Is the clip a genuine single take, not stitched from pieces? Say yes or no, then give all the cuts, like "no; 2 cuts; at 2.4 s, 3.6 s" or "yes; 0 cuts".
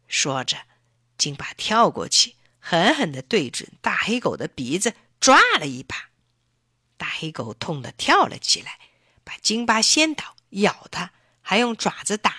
yes; 0 cuts